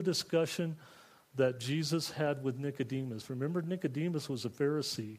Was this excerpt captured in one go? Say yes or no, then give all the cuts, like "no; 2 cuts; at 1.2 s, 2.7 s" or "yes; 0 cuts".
yes; 0 cuts